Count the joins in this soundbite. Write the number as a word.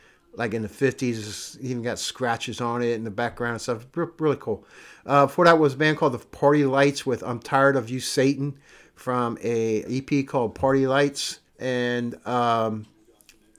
two